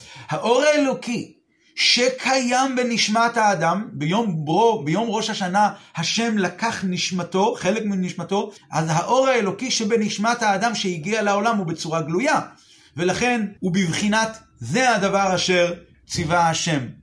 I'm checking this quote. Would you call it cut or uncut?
cut